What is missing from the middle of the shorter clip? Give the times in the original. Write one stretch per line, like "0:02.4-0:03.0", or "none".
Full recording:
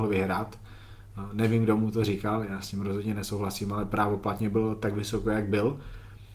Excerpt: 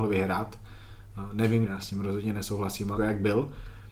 0:01.6-0:02.5
0:03.8-0:05.2